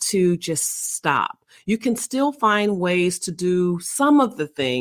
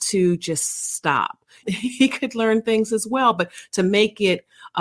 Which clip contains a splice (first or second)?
second